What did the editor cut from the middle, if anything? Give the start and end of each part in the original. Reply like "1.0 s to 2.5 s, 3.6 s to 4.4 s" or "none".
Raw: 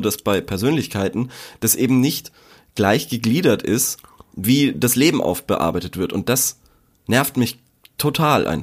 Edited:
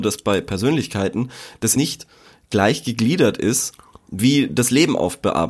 1.8 s to 2.0 s